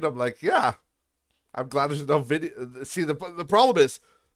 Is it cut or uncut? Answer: uncut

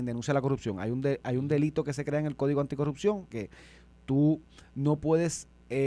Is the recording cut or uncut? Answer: cut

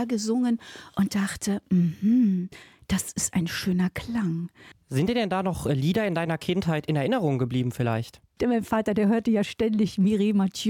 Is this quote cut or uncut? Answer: cut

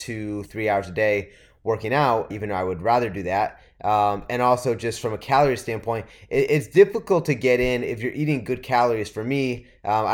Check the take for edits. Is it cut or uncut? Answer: cut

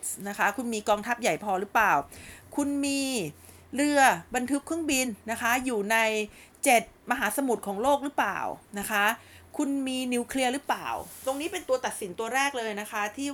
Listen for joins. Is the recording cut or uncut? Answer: uncut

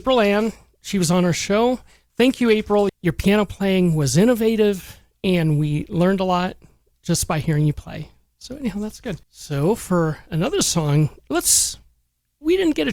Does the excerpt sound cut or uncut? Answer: cut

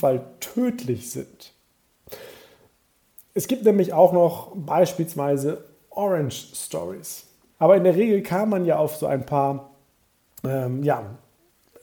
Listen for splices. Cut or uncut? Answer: cut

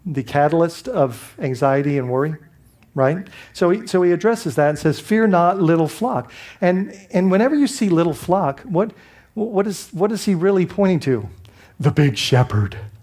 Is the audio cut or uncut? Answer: uncut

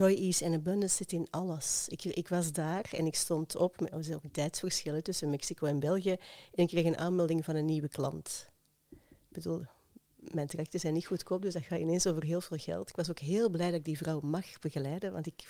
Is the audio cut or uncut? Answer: uncut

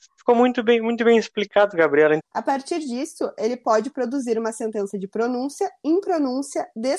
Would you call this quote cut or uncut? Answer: cut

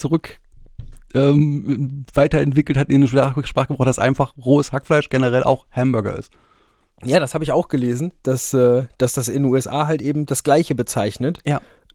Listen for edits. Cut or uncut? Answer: uncut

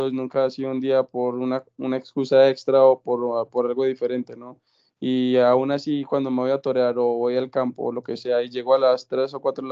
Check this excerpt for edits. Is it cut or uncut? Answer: uncut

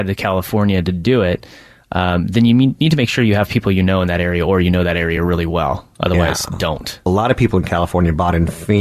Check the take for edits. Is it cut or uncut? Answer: uncut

